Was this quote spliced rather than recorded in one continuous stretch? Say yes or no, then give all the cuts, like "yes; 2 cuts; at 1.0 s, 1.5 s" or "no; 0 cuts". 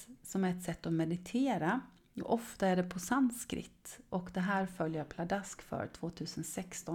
no; 0 cuts